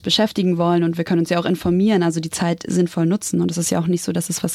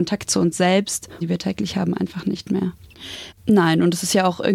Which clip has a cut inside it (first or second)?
second